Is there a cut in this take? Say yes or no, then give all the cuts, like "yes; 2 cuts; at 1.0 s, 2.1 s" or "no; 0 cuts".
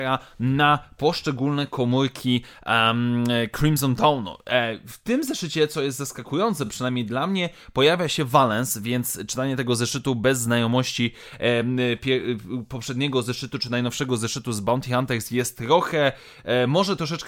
no; 0 cuts